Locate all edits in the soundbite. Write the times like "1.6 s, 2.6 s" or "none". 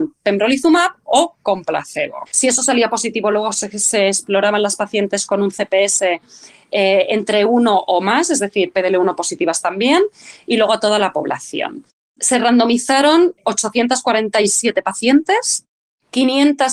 2.3 s